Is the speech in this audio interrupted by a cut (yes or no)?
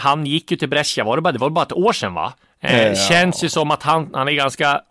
no